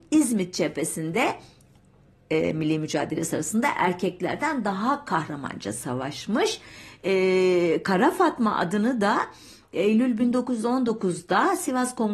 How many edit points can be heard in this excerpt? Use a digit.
0